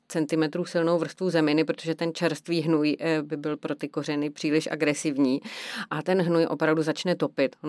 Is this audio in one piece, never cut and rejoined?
yes; 0 cuts

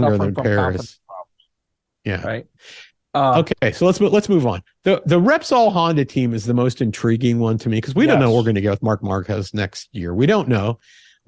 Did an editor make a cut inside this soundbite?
no; 0 cuts

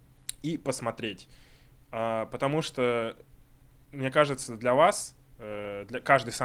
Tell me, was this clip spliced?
no; 0 cuts

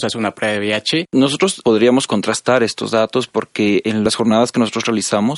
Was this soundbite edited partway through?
yes; 1 cut; at 1.1 s

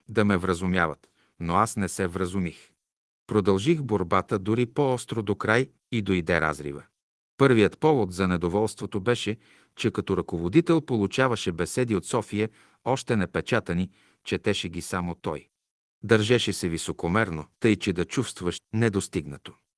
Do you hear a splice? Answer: yes; 2 cuts; at 17.5 s, 18.6 s

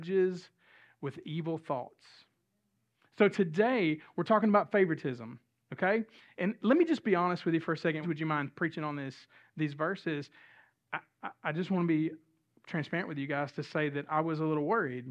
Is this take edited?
yes; 1 cut; at 8.0 s

